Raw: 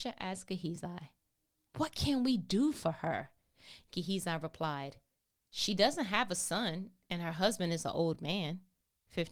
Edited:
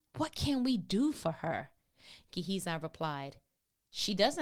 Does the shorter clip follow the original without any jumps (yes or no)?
yes